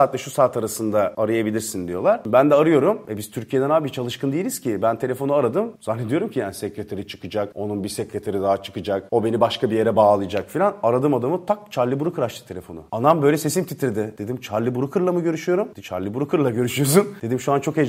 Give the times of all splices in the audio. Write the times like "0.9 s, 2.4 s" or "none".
none